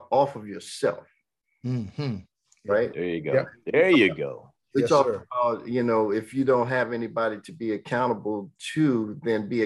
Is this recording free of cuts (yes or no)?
yes